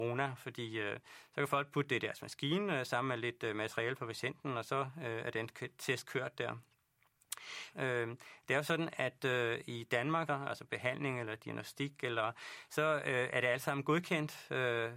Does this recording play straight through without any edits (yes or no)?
no